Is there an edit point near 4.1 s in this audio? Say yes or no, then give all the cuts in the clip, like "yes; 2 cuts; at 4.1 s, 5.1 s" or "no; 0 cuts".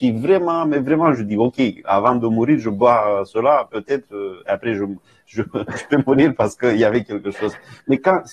no; 0 cuts